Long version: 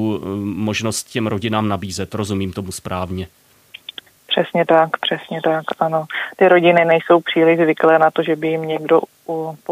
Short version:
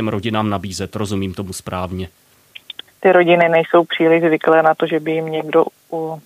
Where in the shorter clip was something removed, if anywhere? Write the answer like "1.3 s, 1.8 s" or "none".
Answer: 3.0 s